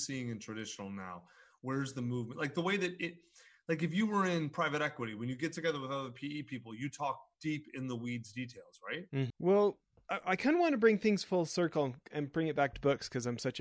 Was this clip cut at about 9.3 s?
yes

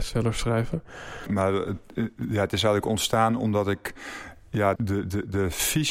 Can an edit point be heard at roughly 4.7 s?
yes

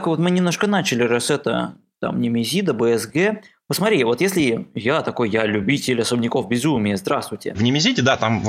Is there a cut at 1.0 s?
no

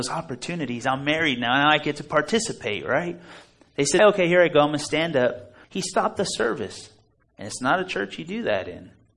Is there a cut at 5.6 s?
yes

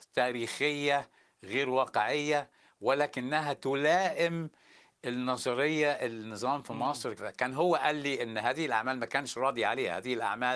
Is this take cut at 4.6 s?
no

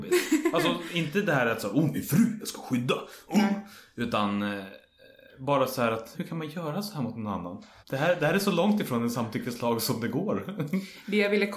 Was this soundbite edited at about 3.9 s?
no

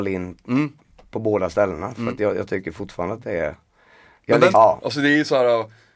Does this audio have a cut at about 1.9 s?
no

